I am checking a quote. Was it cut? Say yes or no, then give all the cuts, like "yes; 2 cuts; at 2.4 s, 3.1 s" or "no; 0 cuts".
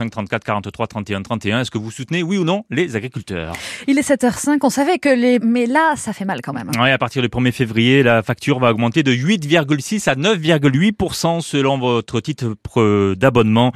yes; 1 cut; at 5.4 s